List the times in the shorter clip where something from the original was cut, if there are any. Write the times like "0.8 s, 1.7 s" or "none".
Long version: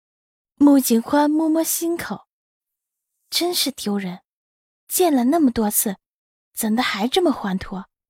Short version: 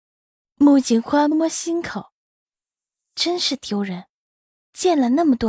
1.3 s